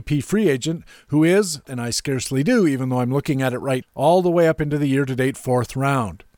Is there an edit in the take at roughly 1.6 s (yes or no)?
yes